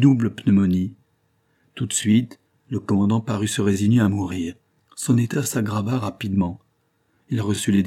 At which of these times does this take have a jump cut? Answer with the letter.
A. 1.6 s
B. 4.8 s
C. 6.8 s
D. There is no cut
B